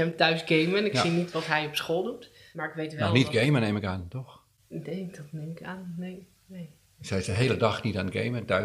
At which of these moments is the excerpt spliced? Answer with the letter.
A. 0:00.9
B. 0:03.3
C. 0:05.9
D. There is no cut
D